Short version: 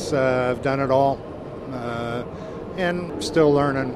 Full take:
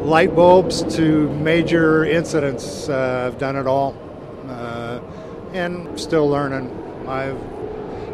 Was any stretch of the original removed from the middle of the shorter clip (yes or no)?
no